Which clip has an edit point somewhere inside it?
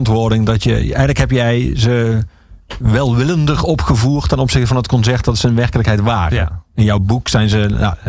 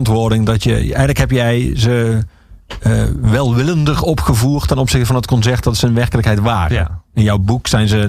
first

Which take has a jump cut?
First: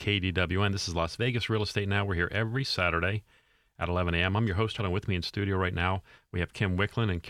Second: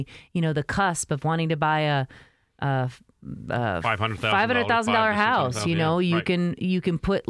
first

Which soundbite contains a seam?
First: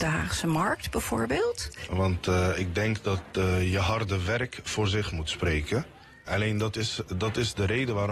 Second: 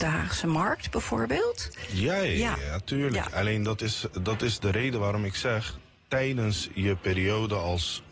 first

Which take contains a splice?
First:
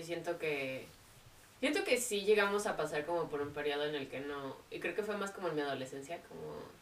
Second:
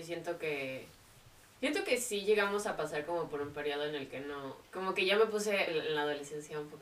second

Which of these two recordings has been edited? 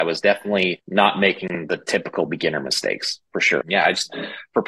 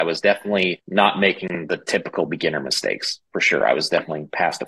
first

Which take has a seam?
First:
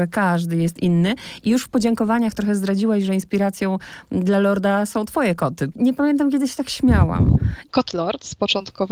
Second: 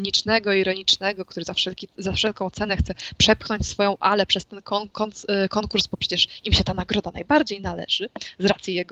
first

